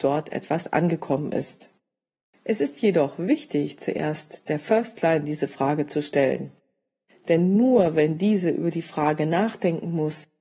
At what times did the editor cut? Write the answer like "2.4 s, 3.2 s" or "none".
none